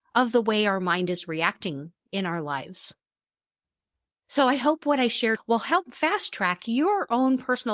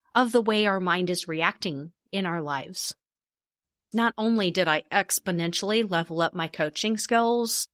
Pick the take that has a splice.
second; 1 cut; at 3.9 s

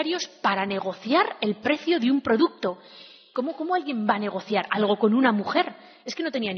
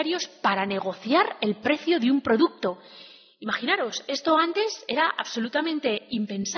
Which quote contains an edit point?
first; 1 cut; at 3.3 s

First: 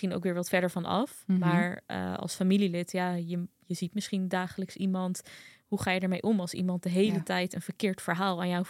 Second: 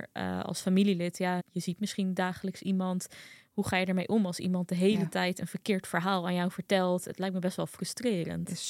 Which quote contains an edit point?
second; 1 cut; at 1.4 s

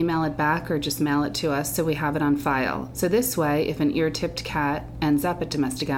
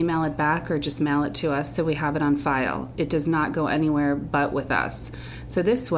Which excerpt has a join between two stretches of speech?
first; 1 cut; at 2.9 s

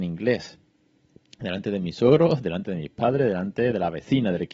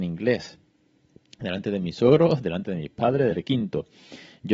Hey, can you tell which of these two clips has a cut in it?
second; 1 cut; at 3.3 s

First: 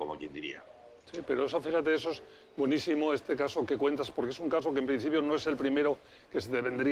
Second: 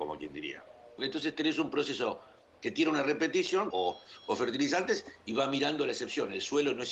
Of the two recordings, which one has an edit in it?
second; 2 cuts; at 1.0 s, 3.7 s

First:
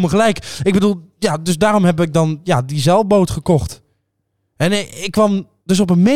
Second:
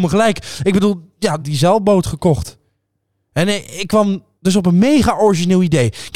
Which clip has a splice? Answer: second; 1 cut; at 1.4 s

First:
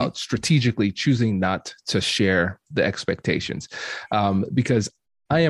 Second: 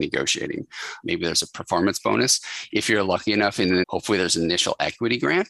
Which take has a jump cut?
second; 2 cuts; at 1.0 s, 3.8 s

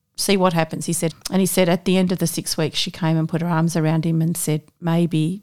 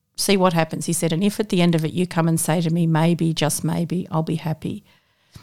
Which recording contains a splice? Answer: first; 1 cut; at 1.1 s

